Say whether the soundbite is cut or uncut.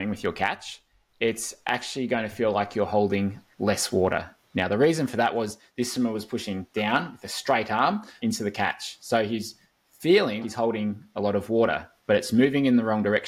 cut